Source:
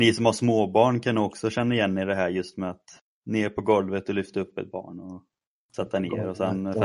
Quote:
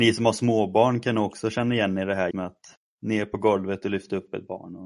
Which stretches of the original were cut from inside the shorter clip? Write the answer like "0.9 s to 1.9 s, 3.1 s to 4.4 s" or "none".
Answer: 2.3 s to 2.5 s